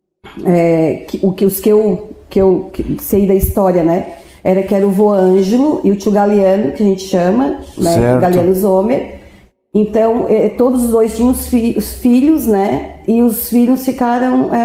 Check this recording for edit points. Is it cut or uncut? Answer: uncut